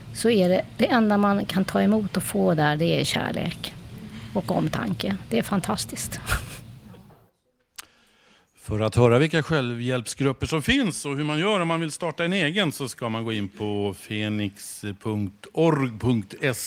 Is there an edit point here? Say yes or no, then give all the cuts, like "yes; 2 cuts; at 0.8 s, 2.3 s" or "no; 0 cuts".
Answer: no; 0 cuts